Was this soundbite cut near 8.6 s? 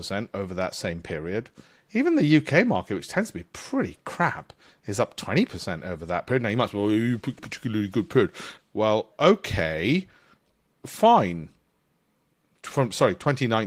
yes; 3 cuts; at 7.4 s, 8.6 s, 10.7 s

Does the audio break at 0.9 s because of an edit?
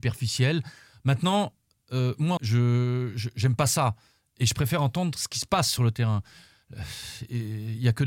no; 1 cut; at 2.4 s

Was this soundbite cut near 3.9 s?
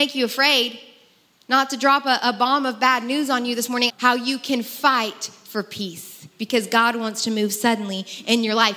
yes; 1 cut; at 3.9 s

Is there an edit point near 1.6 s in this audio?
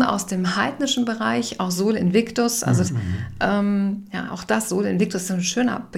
no; 1 cut; at 2.9 s

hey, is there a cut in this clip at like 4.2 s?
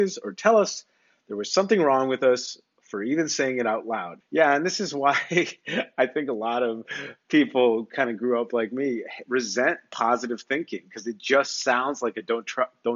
yes; 1 cut; at 4.2 s

